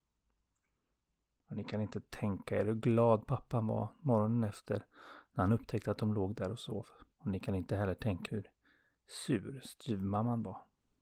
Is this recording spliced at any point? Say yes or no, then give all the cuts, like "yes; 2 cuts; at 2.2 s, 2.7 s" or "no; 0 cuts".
yes; 2 cuts; at 7.1 s, 8.3 s